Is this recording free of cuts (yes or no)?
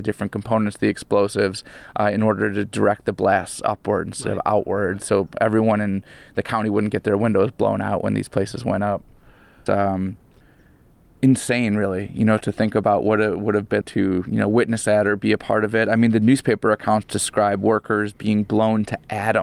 no